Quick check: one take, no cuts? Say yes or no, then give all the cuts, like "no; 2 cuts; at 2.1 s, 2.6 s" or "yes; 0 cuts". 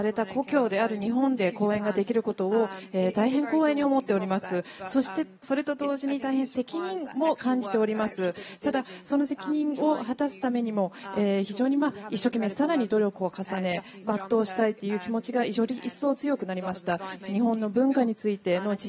no; 1 cut; at 17.2 s